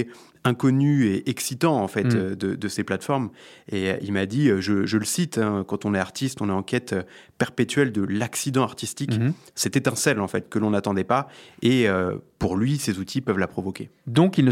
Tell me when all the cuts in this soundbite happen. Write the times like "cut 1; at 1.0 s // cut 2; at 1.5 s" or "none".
none